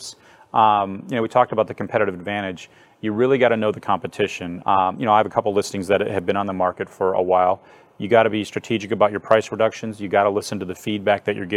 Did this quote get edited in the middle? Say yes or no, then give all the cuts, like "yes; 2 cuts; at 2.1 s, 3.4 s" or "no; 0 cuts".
yes; 1 cut; at 4.6 s